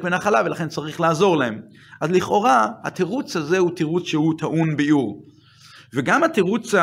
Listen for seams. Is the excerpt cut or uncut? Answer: uncut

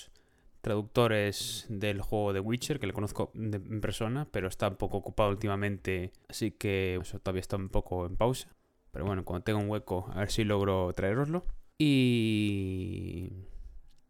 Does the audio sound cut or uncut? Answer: cut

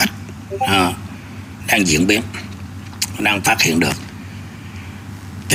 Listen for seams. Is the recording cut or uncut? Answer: cut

